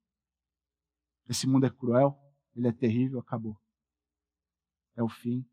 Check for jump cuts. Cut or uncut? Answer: uncut